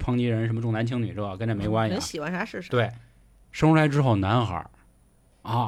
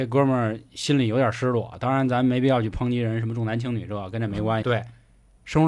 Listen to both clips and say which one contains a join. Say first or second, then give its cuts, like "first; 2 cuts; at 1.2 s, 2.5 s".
second; 1 cut; at 4.6 s